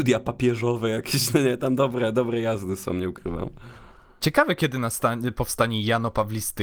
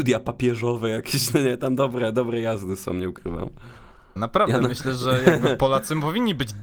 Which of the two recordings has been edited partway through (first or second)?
second